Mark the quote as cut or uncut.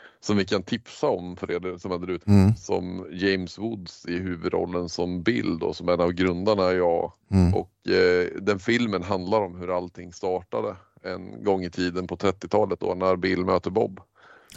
cut